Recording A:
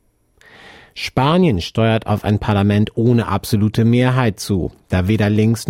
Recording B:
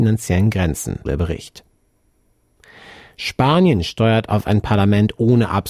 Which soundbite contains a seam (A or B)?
B